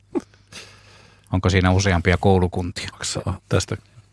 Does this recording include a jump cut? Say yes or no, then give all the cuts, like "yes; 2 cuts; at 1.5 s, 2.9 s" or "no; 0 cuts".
yes; 1 cut; at 2.9 s